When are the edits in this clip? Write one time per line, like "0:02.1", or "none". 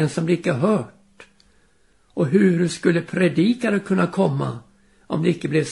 0:01.9